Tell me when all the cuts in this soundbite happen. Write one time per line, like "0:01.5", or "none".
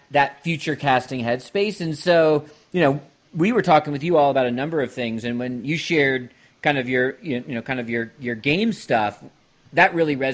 none